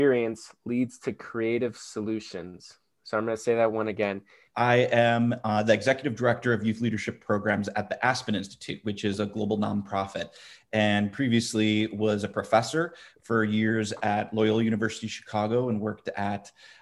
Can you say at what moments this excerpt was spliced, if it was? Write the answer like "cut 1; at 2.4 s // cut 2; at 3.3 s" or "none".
cut 1; at 4.5 s